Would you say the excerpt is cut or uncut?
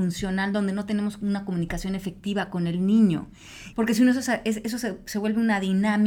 cut